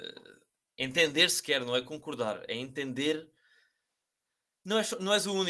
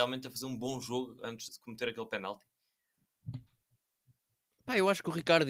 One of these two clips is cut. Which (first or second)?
second